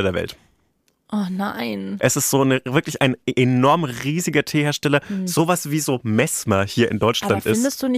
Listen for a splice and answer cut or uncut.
uncut